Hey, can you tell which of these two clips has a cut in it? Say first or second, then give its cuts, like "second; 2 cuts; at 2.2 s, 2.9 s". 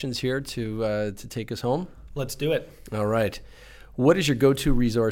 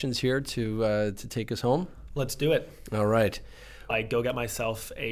second; 1 cut; at 3.9 s